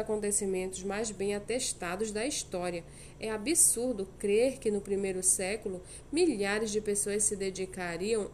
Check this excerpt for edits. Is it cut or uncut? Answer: uncut